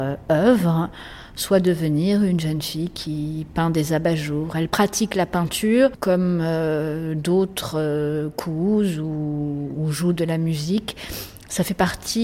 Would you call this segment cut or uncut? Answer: uncut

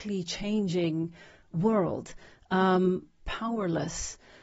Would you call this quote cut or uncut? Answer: cut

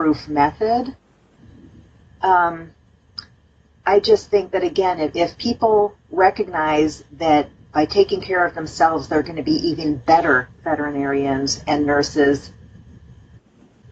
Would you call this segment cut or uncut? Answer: cut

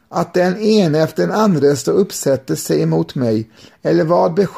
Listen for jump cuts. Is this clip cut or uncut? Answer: uncut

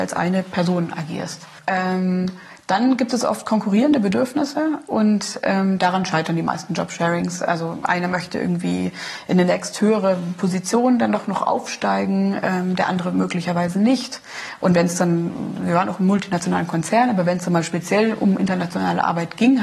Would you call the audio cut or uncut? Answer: cut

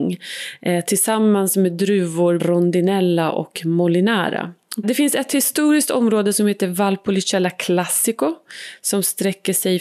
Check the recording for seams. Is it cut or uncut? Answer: cut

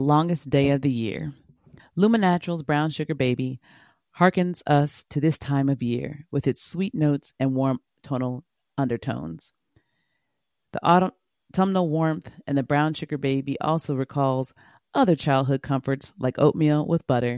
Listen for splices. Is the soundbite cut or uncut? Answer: cut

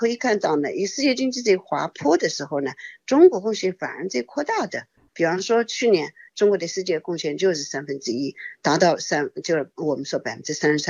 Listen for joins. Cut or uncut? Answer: cut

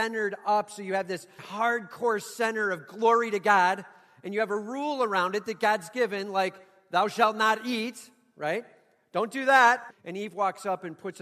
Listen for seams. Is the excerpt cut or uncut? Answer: cut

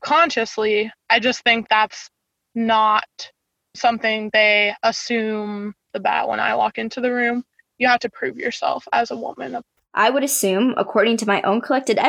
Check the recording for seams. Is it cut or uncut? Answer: cut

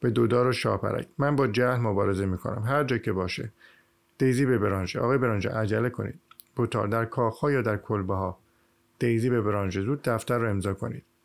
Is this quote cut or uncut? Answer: uncut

